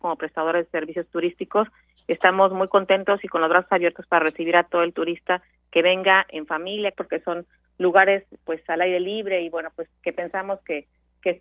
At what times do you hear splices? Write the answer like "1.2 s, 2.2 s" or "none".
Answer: 6.9 s, 8.4 s